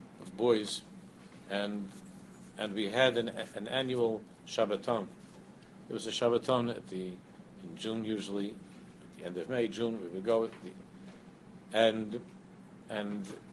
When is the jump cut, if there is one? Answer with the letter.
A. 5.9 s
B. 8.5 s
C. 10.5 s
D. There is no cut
D